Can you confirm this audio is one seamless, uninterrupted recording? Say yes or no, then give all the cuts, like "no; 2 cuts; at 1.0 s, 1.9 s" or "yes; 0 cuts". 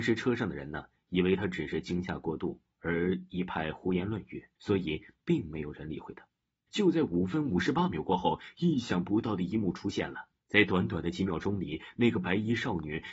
no; 3 cuts; at 4.6 s, 6.7 s, 10.4 s